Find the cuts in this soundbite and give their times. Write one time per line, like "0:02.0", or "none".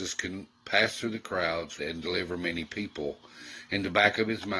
0:01.8